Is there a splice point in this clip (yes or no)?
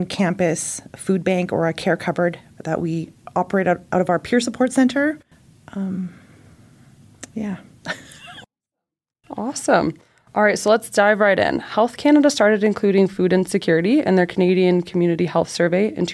no